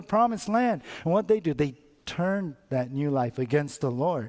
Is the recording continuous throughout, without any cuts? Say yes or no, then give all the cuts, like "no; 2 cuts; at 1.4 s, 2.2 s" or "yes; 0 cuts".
yes; 0 cuts